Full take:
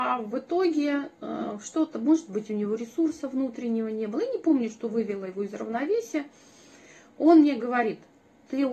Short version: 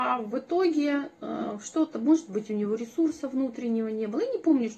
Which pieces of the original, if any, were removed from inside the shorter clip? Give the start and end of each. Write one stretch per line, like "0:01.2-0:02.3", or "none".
none